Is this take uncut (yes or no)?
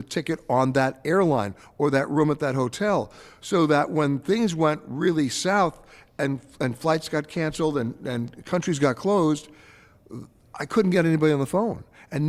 yes